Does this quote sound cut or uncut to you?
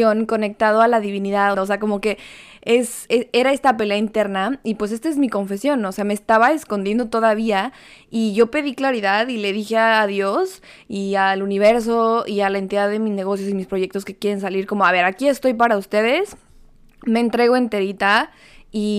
cut